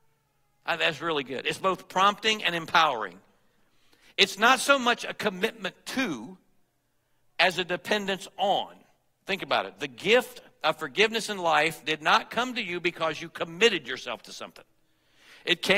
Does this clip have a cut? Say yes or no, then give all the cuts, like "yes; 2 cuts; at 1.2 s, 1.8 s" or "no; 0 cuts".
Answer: no; 0 cuts